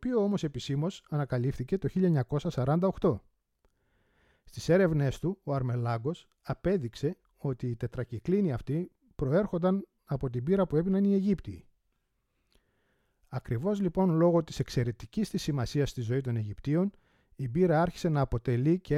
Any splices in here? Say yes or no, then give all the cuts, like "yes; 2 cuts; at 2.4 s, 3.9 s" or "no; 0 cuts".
no; 0 cuts